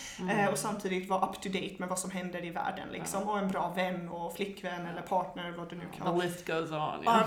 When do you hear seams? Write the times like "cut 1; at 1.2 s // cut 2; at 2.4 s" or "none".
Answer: none